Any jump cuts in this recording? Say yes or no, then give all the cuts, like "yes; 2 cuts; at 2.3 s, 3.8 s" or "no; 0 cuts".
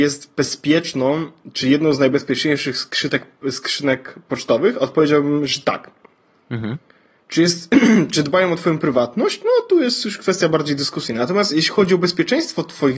no; 0 cuts